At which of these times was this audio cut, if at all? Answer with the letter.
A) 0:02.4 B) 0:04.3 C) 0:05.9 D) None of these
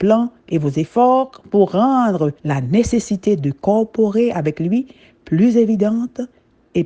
A